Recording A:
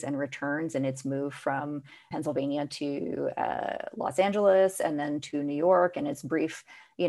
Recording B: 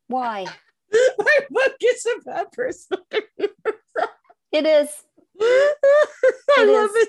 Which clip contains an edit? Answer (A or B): A